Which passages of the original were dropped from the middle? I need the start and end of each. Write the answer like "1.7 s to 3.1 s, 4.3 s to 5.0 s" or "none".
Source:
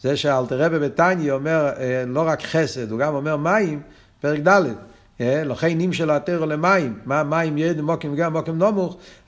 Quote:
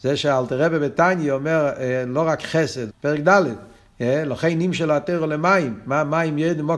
2.9 s to 4.1 s